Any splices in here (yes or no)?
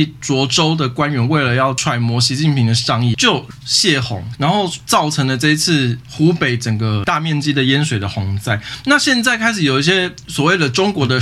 yes